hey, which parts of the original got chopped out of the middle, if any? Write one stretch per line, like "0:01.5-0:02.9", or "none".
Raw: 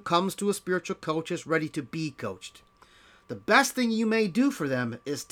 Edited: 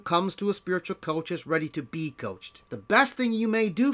0:02.6-0:03.2